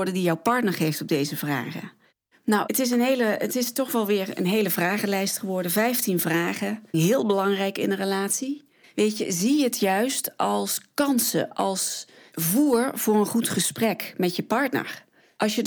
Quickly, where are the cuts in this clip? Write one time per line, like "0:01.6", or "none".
0:06.9
0:08.8